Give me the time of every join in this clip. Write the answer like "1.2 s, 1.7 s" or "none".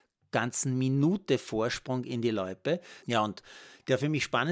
3.0 s